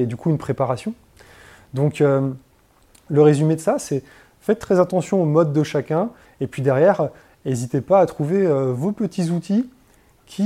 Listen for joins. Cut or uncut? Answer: cut